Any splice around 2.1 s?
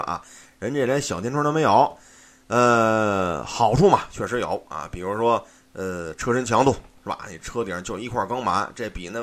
no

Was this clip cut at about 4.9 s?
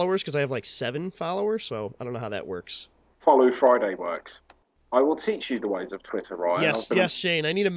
no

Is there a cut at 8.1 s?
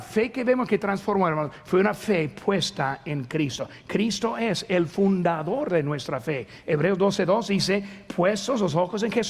no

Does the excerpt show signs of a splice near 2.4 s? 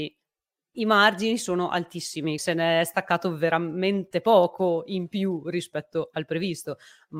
yes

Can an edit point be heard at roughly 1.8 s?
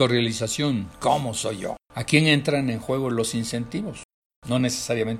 yes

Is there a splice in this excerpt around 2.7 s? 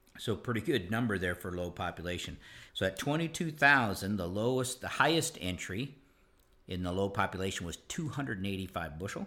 yes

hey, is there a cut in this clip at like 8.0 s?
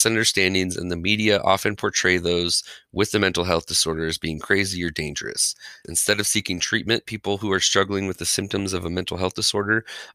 no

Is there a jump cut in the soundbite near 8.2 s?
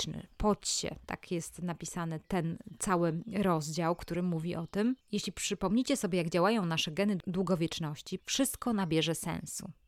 yes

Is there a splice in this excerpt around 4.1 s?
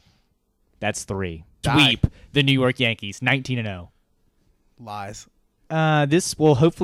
no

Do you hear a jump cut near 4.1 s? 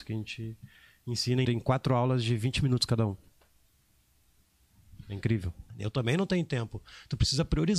no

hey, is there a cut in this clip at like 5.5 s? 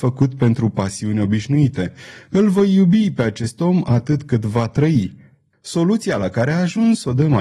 yes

